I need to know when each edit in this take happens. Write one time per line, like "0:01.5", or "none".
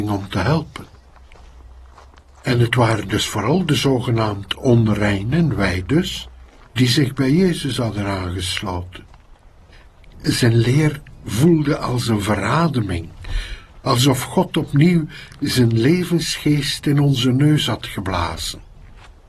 0:13.8